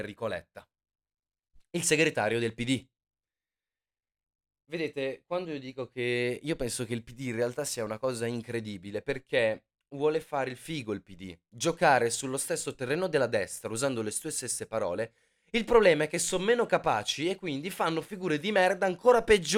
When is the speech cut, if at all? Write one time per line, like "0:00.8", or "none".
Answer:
none